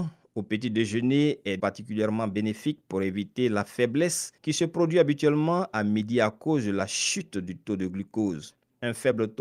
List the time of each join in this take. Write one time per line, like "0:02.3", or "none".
0:01.6
0:04.4